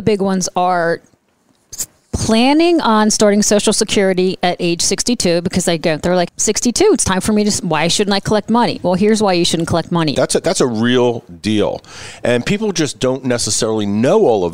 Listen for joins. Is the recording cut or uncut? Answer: cut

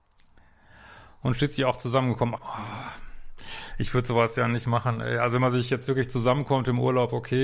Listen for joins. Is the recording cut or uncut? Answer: cut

